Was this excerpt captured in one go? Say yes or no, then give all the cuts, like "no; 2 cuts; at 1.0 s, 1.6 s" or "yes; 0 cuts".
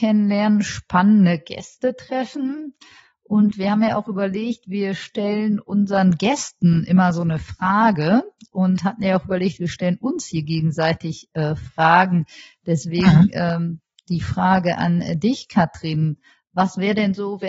yes; 0 cuts